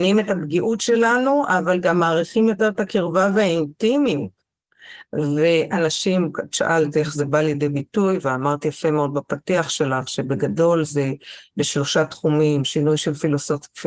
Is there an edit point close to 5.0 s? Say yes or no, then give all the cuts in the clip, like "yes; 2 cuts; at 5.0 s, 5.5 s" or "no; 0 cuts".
yes; 1 cut; at 5.0 s